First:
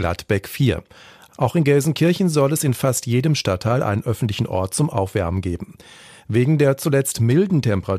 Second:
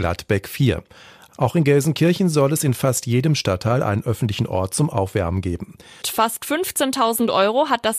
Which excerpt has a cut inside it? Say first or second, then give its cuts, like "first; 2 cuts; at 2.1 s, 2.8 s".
second; 1 cut; at 6.0 s